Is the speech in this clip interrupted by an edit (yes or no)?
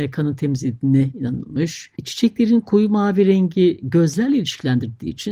yes